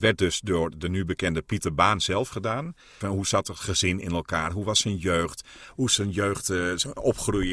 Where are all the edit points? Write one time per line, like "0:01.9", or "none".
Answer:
0:03.0